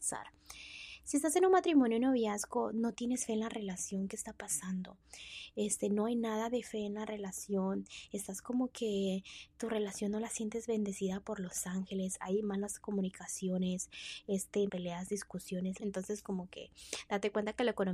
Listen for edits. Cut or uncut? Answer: cut